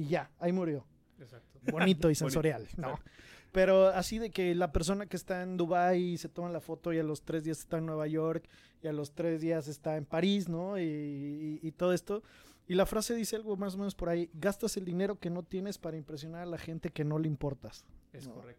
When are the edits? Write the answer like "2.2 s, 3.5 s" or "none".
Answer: 1.6 s